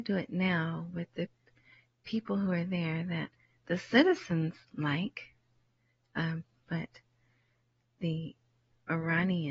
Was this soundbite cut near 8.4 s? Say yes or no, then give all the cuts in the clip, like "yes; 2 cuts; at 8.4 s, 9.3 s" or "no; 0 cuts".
no; 1 cut; at 6.6 s